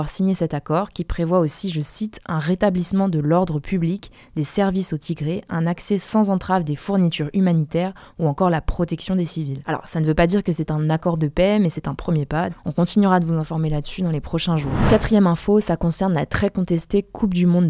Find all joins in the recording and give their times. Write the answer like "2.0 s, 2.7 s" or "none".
12.5 s